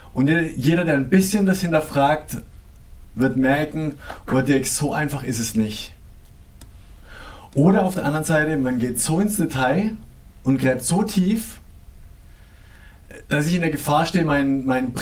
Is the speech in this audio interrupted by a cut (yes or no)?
no